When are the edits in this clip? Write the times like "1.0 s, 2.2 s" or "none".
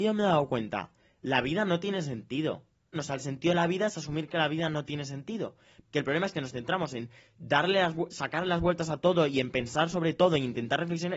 2.9 s, 5.9 s